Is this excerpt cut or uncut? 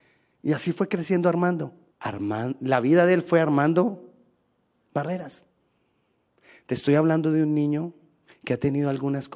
cut